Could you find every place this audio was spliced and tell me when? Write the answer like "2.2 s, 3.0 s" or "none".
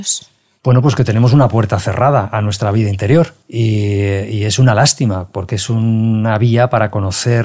3.4 s